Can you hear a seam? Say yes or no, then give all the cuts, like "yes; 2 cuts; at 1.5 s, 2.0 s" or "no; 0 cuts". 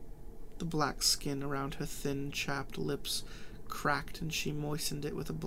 no; 0 cuts